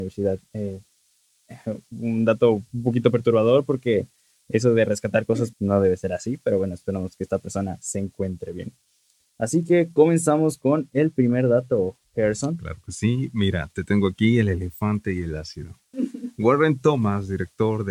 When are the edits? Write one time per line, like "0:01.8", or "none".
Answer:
0:05.5
0:15.9